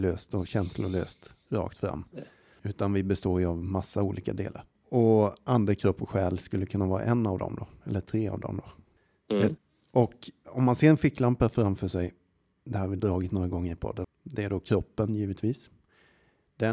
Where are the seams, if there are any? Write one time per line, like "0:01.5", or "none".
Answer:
0:14.0